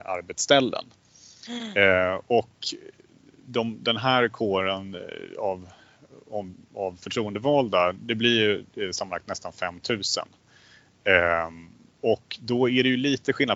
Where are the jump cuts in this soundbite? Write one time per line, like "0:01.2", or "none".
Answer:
none